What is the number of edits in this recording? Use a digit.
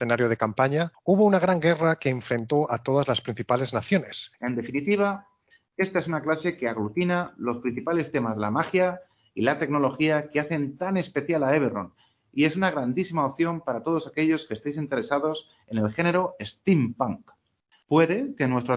2